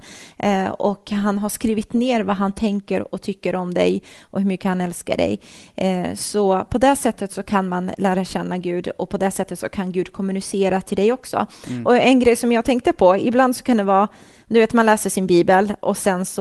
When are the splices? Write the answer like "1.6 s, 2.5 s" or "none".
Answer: none